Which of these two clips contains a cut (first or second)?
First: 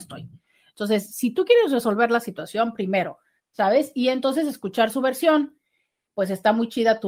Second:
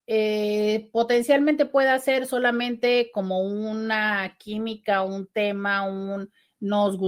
first